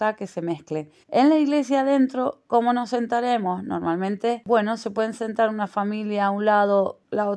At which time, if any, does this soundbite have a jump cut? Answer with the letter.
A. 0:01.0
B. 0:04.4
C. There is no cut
A